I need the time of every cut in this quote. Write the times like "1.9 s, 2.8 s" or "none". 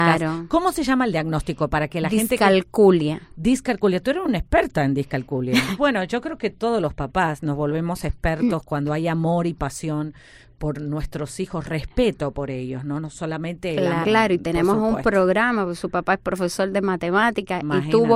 5.8 s, 14.0 s